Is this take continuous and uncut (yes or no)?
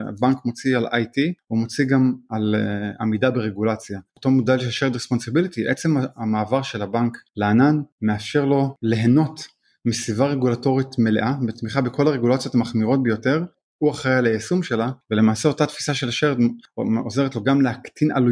yes